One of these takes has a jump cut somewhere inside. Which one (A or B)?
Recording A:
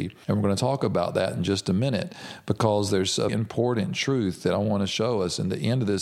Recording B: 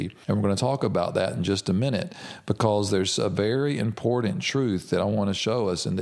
A